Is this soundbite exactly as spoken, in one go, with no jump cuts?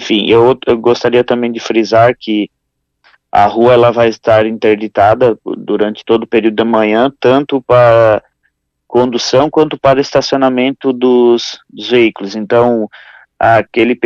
yes; 0 cuts

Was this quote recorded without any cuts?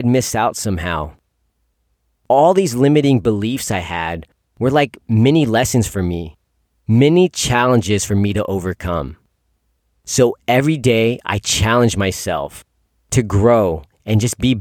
yes; 0 cuts

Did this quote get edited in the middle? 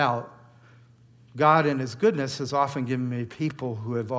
no; 0 cuts

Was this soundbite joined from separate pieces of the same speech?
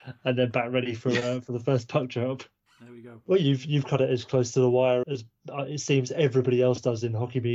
yes; 2 cuts; at 2.7 s, 5.0 s

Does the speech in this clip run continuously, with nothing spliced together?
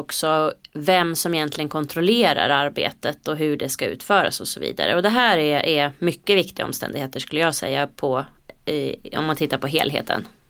yes; 0 cuts

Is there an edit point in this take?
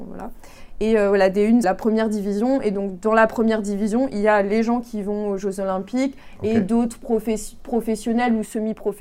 yes; 1 cut; at 1.6 s

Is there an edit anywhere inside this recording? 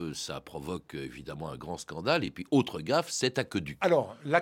no; 0 cuts

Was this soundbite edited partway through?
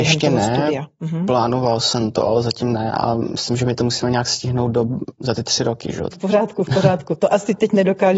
yes; 1 cut; at 6.1 s

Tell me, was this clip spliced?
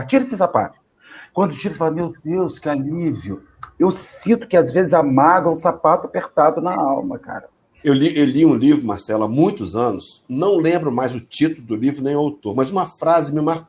yes; 1 cut; at 7.8 s

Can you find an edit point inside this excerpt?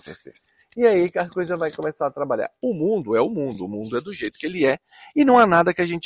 no; 0 cuts

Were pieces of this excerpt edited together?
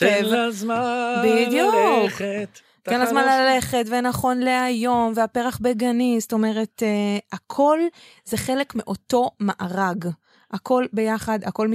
no; 0 cuts

